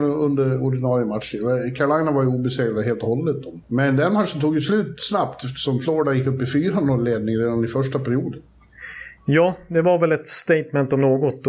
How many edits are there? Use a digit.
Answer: 1